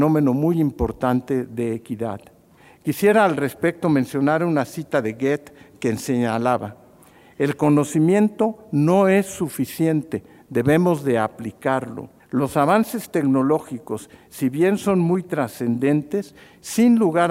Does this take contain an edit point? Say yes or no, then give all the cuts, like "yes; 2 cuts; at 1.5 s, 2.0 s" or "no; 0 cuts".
yes; 1 cut; at 12.2 s